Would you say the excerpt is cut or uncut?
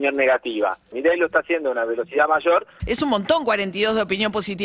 cut